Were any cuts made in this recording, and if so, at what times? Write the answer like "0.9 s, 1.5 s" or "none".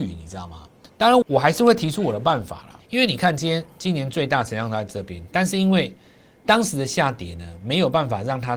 1.2 s, 2.8 s